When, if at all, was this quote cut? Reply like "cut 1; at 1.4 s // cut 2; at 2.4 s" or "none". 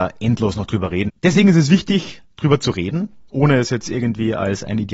cut 1; at 1.1 s // cut 2; at 3.3 s